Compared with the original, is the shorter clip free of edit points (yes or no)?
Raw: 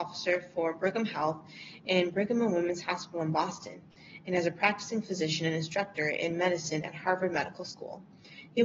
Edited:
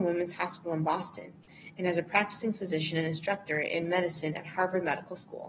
yes